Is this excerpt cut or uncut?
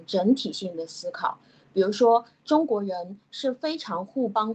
uncut